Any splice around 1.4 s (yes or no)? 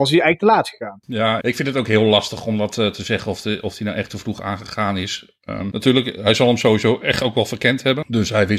yes